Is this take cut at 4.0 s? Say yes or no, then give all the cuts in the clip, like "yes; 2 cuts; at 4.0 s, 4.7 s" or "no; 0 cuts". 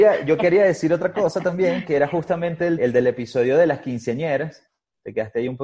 no; 1 cut; at 2.8 s